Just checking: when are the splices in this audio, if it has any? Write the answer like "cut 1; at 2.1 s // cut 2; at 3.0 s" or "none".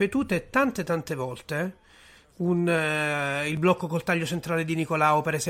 none